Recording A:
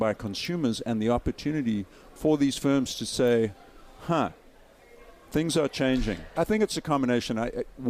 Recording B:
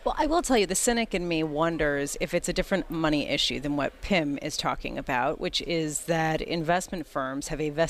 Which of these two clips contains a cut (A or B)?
A